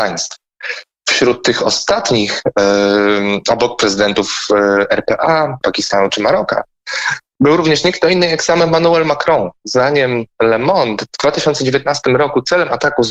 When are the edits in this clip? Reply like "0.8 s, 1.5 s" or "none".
5.6 s